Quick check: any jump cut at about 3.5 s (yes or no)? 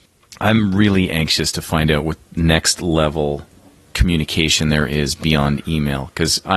no